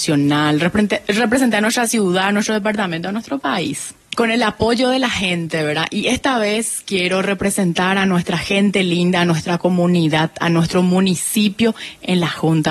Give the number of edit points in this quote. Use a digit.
1